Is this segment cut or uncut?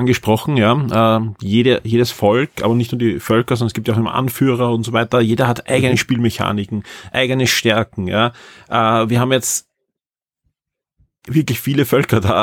uncut